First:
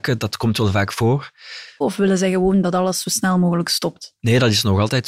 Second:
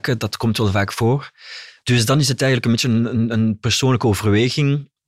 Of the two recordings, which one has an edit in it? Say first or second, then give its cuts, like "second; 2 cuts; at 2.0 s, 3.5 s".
first; 1 cut; at 1.8 s